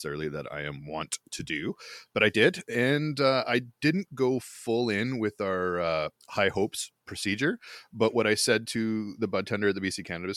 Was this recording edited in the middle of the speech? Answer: no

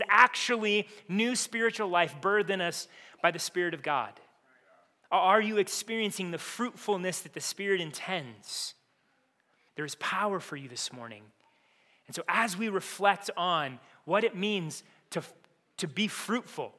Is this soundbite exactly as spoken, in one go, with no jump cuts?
no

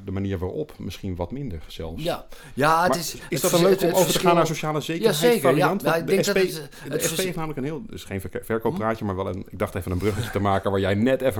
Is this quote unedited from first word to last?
yes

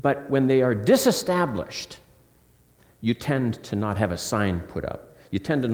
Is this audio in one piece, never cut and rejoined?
yes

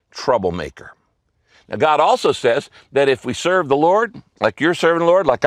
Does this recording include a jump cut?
no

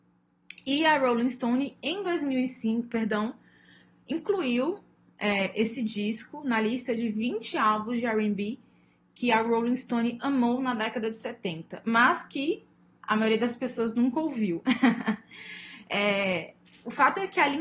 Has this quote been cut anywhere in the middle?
yes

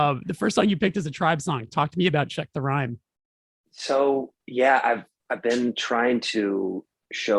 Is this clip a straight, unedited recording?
yes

